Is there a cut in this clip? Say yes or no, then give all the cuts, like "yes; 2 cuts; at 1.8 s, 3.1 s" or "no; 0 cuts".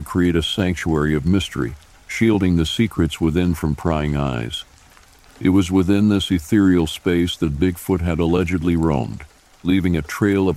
no; 0 cuts